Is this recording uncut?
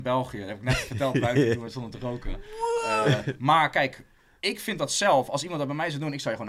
yes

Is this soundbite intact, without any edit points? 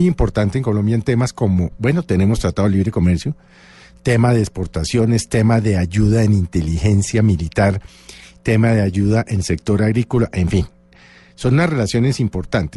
yes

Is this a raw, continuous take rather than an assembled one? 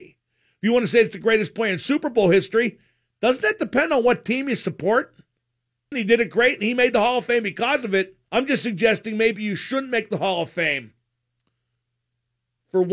no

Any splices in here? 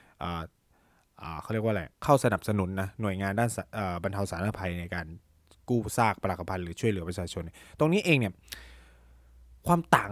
yes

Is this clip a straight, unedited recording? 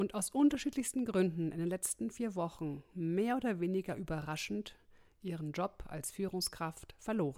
yes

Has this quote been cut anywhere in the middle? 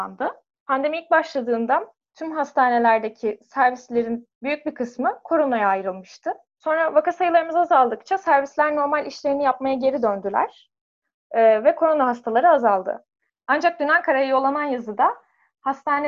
no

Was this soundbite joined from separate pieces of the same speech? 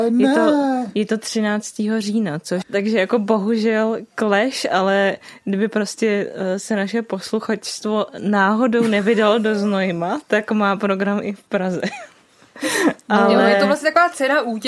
yes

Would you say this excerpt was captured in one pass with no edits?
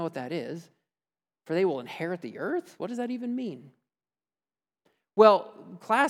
yes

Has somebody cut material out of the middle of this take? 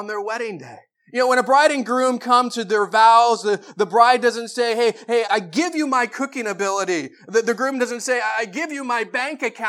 yes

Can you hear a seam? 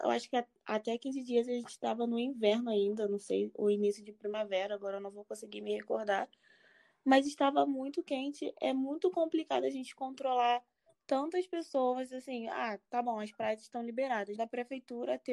yes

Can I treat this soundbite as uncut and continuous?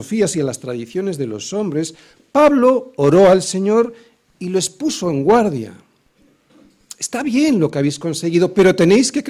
yes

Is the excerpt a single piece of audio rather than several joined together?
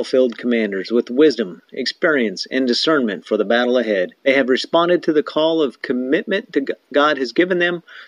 no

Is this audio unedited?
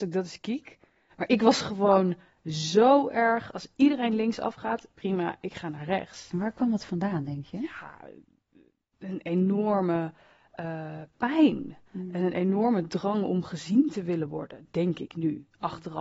yes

